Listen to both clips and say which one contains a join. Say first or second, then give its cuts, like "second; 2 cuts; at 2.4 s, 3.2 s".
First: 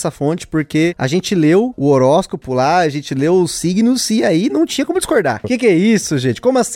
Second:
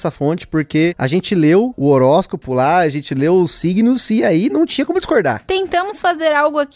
first; 1 cut; at 5.4 s